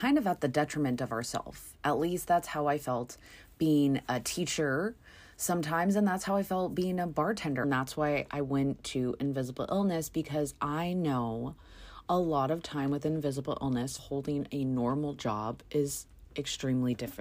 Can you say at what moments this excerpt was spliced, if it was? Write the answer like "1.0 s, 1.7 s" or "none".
7.6 s, 14.0 s